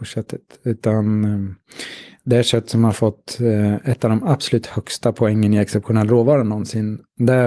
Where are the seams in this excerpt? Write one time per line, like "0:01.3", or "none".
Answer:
none